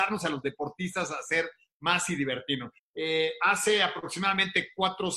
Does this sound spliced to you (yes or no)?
yes